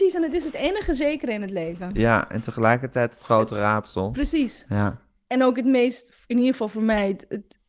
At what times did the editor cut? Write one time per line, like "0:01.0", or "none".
none